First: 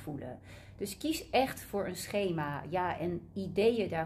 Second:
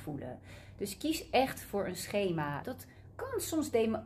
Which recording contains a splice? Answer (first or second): second